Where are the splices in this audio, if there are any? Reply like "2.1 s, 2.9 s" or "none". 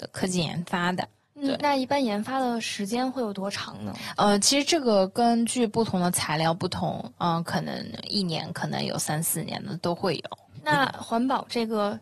none